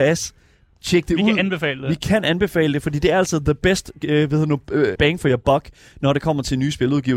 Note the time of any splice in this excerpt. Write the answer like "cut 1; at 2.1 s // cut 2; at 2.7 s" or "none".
cut 1; at 5.0 s